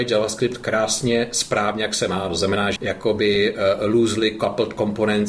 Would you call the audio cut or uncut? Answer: cut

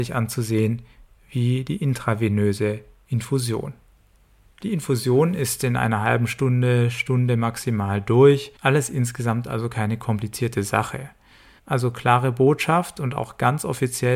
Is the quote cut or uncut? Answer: cut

